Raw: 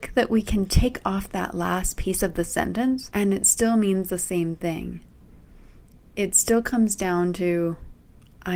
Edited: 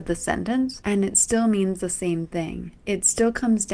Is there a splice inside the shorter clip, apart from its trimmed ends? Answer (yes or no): yes